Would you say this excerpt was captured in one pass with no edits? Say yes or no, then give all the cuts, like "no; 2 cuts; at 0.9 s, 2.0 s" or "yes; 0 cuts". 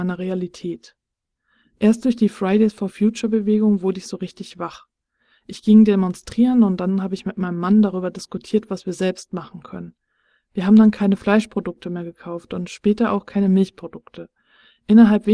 yes; 0 cuts